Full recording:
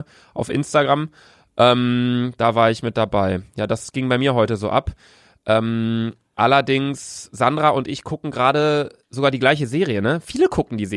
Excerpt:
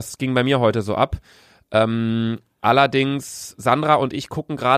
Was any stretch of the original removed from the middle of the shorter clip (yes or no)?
no